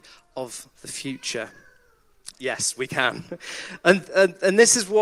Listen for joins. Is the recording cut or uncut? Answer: cut